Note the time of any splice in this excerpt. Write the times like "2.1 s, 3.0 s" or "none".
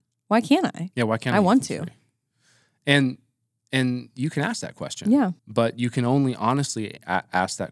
5.4 s